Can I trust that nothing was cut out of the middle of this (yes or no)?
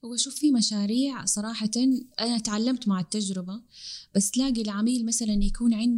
yes